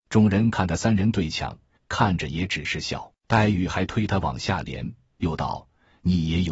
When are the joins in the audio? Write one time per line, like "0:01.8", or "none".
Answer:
0:01.8
0:03.2